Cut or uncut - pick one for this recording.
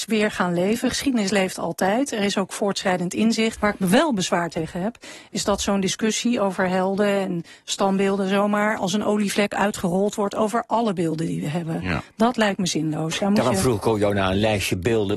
cut